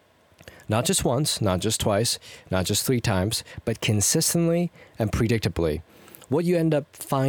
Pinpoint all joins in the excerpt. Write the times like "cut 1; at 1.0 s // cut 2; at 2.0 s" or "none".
none